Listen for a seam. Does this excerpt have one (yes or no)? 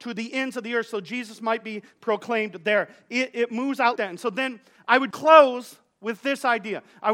yes